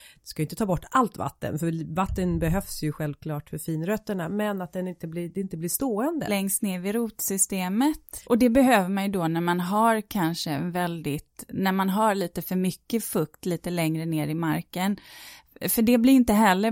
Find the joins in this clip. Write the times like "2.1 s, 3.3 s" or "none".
6.3 s, 8.2 s